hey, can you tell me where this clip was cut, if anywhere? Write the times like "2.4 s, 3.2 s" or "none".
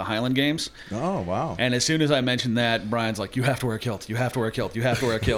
none